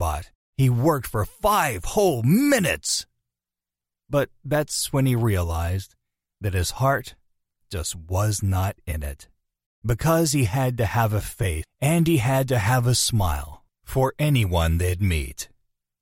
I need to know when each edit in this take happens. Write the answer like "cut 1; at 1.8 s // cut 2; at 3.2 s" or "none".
cut 1; at 9.7 s // cut 2; at 11.6 s